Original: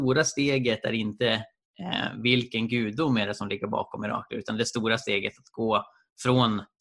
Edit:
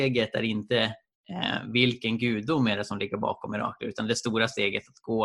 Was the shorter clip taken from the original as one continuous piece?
yes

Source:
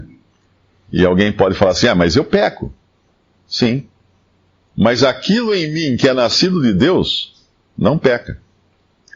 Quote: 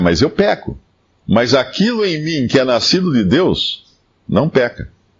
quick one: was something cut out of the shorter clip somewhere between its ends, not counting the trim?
yes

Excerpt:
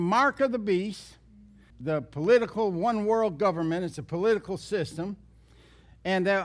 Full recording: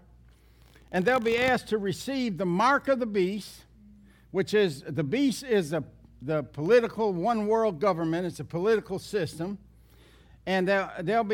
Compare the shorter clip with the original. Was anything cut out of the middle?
yes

